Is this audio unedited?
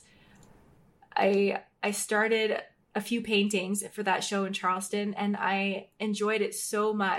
yes; 0 cuts

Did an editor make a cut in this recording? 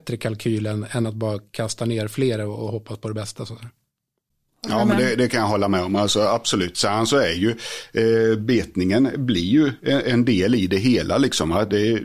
no; 0 cuts

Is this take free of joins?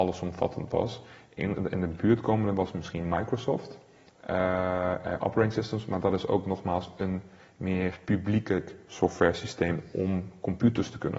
no; 1 cut; at 8.0 s

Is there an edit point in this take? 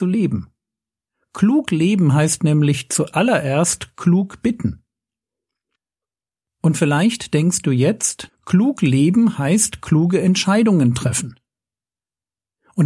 yes; 1 cut; at 8.3 s

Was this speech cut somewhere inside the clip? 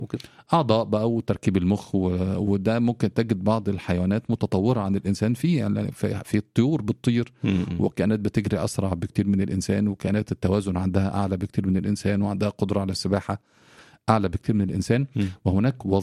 no; 0 cuts

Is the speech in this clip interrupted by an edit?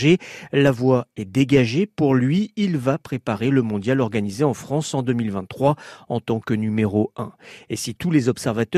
no; 0 cuts

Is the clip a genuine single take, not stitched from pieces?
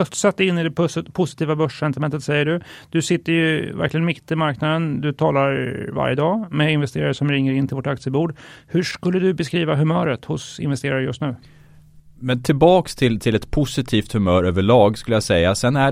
yes; 0 cuts

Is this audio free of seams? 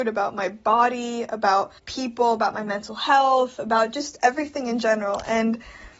no; 1 cut; at 1.8 s

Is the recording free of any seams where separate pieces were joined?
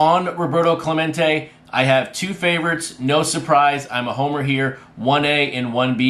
yes; 0 cuts

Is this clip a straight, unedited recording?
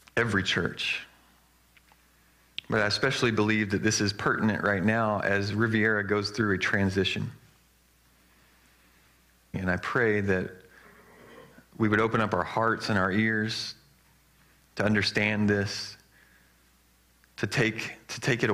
no; 1 cut; at 9.5 s

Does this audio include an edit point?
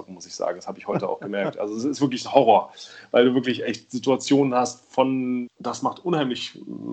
yes; 1 cut; at 5.5 s

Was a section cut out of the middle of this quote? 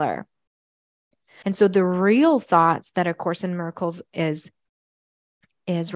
yes; 1 cut; at 1.4 s

